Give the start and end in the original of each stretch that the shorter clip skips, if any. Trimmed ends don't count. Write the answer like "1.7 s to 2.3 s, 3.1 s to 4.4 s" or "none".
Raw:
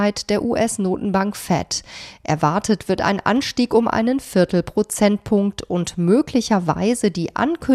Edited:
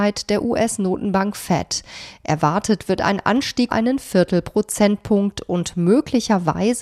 3.7 s to 3.9 s